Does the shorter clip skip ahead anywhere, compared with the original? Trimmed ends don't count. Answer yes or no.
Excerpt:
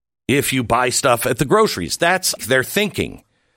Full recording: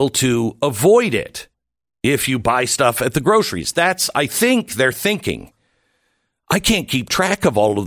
yes